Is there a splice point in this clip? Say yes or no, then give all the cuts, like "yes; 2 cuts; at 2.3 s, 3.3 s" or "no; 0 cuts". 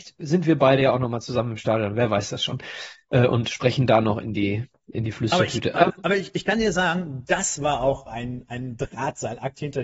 no; 0 cuts